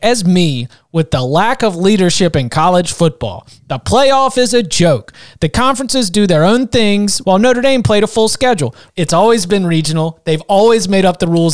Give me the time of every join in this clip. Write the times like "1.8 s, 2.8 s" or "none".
7.2 s, 8.9 s